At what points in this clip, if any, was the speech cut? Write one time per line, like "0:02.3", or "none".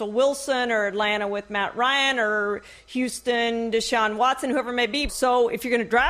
0:05.1